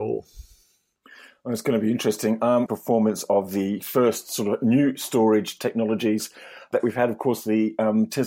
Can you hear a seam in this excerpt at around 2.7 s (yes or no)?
yes